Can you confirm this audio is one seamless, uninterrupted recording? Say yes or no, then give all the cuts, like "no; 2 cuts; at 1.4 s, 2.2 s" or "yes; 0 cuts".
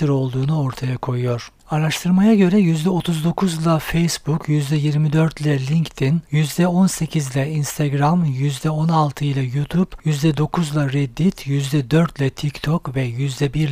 yes; 0 cuts